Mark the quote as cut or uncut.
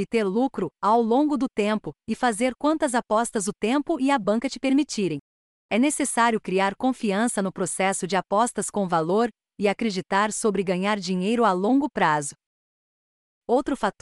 uncut